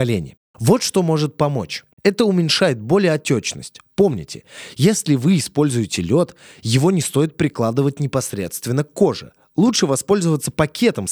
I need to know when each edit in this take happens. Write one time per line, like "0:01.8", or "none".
0:01.9